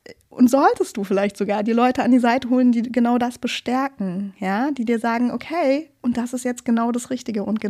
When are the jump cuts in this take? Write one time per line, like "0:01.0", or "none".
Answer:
none